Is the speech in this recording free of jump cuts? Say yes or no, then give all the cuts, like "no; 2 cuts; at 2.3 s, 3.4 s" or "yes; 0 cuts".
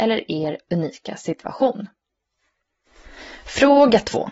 yes; 0 cuts